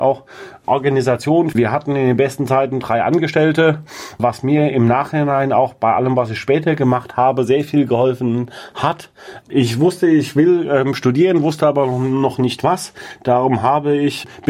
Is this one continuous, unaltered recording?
no; 2 cuts; at 1.5 s, 9.4 s

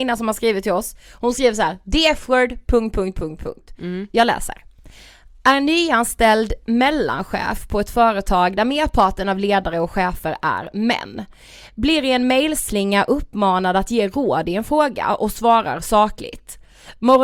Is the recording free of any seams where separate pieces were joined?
yes; 0 cuts

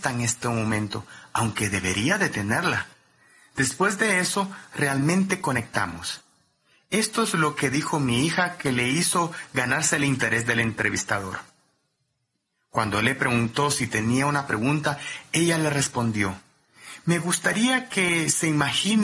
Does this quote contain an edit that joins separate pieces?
no; 0 cuts

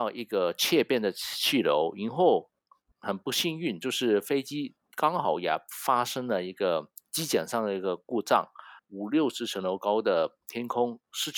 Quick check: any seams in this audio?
yes; 2 cuts; at 2.9 s, 8.8 s

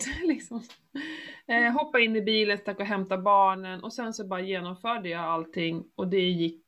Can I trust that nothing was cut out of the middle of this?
yes; 0 cuts

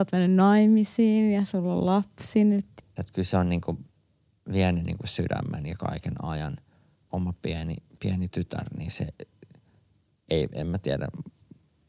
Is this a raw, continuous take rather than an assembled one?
no; 1 cut; at 3.0 s

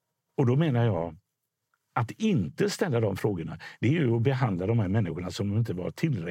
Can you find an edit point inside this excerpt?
no; 0 cuts

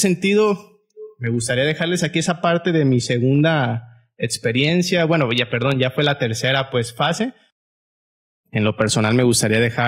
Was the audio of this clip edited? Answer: no; 0 cuts

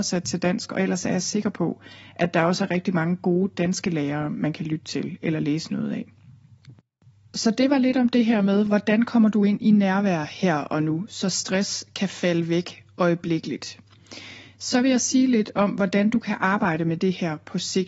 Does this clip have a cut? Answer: no; 0 cuts

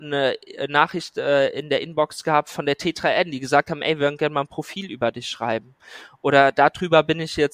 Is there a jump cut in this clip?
no; 0 cuts

